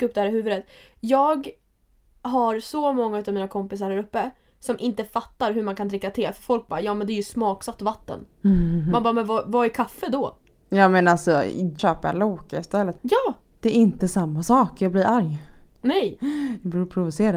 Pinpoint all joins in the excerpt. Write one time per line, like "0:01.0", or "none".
0:11.8
0:13.0

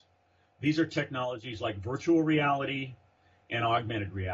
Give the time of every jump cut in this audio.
none

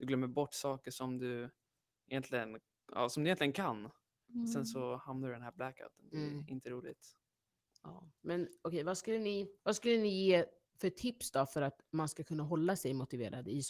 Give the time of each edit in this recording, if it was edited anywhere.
0:08.2
0:09.6

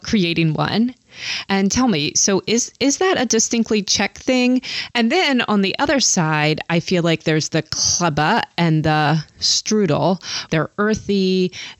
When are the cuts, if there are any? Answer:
0:01.4
0:04.9
0:10.5

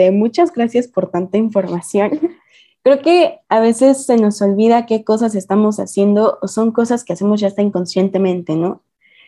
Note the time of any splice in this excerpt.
none

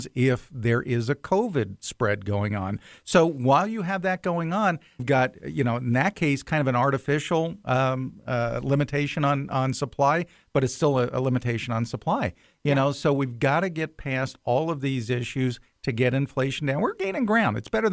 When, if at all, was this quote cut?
0:05.0

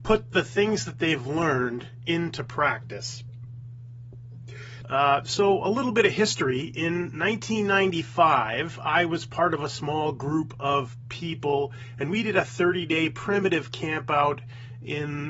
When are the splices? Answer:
0:04.8

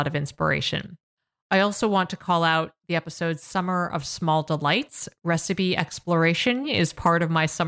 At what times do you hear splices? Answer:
0:06.6

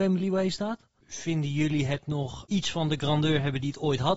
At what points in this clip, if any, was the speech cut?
0:01.0
0:02.5

